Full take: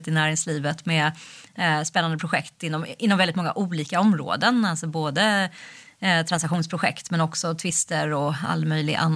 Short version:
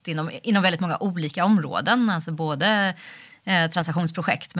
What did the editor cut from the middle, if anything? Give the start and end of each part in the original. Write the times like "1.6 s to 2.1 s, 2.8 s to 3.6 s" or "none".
none